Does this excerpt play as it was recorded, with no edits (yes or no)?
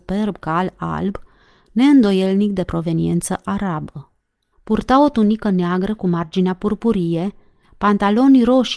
no